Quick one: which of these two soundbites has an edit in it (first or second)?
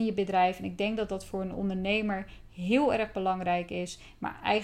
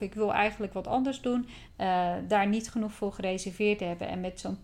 second